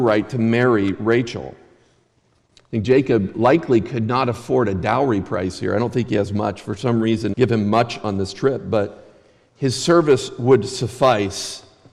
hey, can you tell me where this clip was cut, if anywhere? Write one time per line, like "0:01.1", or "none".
0:07.3